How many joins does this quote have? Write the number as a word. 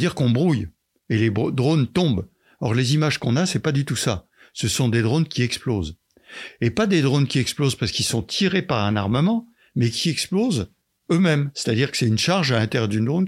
zero